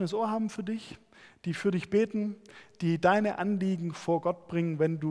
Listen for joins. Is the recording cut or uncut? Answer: uncut